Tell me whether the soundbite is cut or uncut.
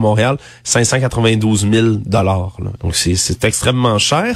cut